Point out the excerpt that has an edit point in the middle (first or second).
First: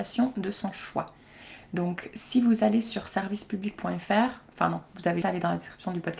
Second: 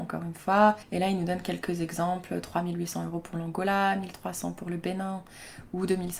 first